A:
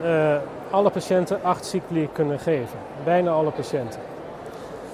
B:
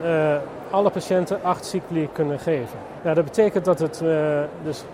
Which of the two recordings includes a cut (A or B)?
B